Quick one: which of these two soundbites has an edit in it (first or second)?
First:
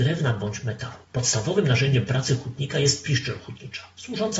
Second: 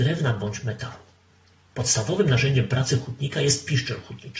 first